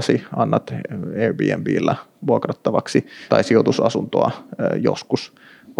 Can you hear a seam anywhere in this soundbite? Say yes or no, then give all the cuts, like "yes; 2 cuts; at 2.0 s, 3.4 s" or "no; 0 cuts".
yes; 1 cut; at 3.3 s